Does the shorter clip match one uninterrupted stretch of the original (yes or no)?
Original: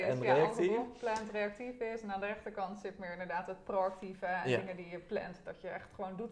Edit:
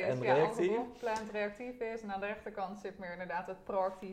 yes